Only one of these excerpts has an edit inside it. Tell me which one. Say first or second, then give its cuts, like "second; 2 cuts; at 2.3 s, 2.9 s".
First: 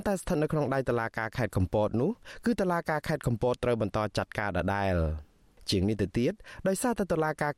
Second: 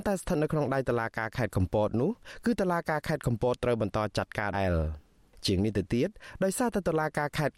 second; 1 cut; at 4.5 s